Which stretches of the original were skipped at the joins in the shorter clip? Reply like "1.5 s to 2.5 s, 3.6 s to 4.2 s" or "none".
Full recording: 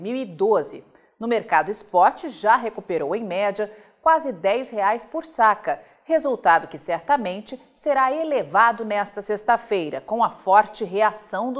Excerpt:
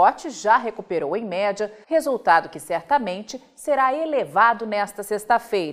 3.8 s to 6.0 s